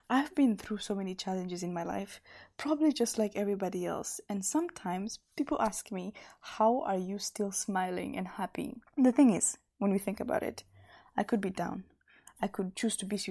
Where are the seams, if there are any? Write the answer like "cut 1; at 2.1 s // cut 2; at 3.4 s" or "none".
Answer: cut 1; at 8.9 s

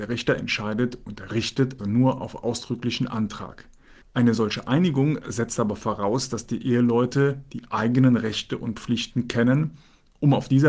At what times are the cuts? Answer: cut 1; at 1.8 s // cut 2; at 4.0 s

